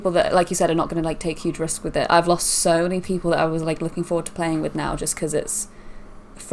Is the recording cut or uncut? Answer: uncut